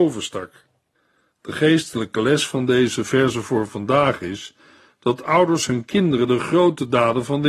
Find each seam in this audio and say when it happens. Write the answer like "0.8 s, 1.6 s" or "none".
none